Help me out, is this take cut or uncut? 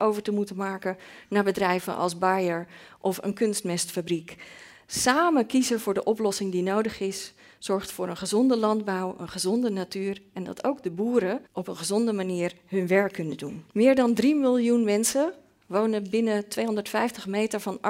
cut